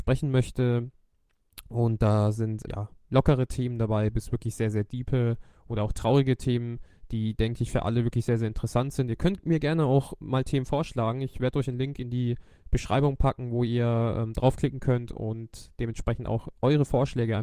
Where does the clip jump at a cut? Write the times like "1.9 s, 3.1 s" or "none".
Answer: 2.7 s